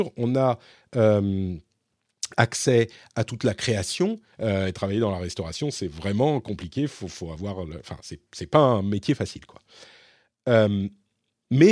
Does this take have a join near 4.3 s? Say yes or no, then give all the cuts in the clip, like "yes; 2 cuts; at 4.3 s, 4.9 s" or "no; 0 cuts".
yes; 1 cut; at 4.3 s